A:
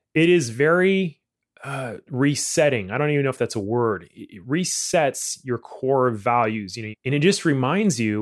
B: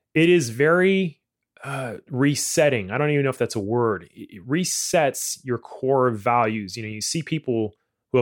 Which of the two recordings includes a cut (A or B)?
A